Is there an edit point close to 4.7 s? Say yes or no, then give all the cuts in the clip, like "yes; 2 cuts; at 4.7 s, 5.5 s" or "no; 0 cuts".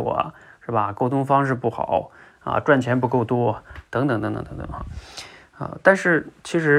no; 0 cuts